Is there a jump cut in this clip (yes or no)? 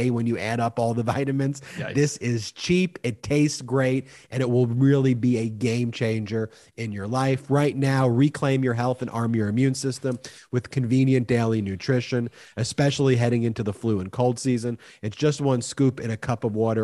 no